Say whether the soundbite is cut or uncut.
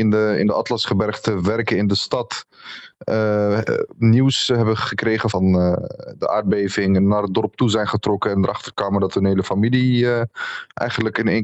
uncut